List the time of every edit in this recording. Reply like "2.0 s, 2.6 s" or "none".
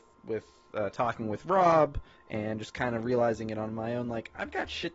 2.1 s